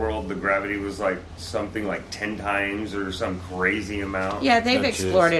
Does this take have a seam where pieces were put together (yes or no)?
no